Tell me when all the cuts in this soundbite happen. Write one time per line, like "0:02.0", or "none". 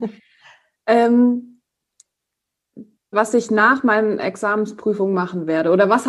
0:03.1